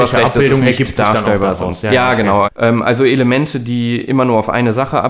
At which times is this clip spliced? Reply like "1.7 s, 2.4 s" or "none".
2.4 s